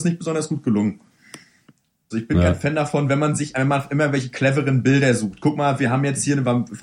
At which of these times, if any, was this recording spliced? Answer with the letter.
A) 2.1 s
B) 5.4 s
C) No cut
A